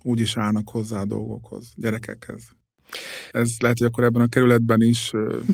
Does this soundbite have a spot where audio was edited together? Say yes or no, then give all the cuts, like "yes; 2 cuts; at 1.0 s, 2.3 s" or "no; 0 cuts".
yes; 1 cut; at 3.3 s